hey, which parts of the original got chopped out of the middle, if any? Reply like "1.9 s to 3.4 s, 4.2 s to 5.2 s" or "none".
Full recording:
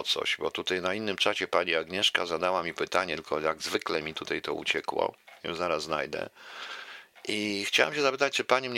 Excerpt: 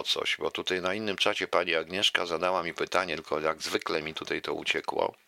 none